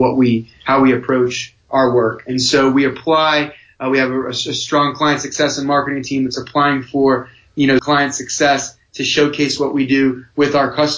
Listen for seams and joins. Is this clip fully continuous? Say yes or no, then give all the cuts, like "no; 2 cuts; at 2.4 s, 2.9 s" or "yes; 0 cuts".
no; 1 cut; at 7.8 s